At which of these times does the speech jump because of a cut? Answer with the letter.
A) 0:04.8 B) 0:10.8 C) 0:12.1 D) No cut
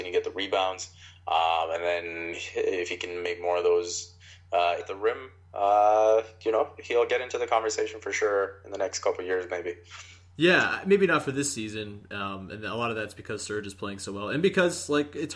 A